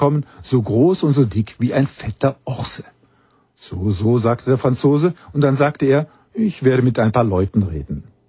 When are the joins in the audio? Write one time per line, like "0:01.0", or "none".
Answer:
none